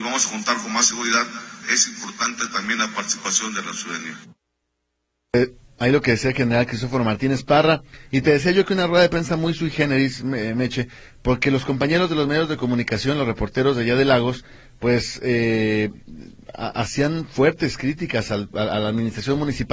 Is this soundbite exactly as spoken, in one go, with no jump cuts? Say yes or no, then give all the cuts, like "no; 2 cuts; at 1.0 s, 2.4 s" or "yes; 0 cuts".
no; 1 cut; at 1.6 s